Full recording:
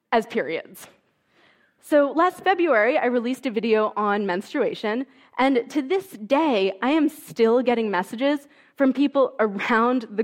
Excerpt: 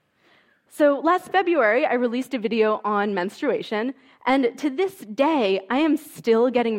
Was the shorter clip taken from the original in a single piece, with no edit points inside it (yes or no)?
yes